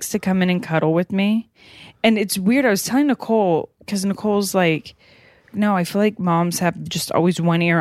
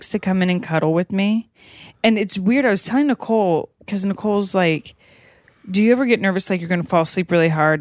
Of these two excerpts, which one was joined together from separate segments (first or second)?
first